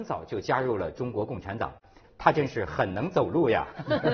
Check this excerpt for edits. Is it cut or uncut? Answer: cut